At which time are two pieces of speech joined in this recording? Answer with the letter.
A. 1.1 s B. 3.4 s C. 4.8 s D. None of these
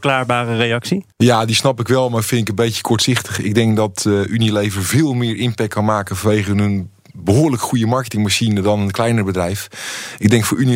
A